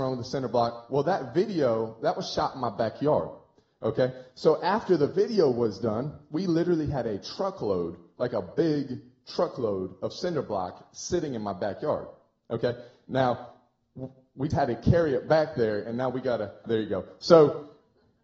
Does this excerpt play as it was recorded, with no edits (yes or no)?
no